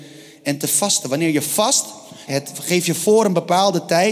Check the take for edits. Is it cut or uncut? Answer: cut